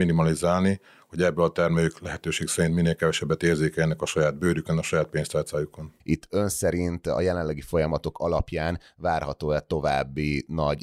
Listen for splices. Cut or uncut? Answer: cut